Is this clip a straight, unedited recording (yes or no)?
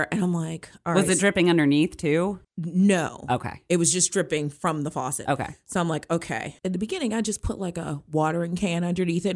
yes